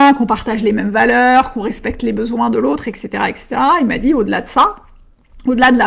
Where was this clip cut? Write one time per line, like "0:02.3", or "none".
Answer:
none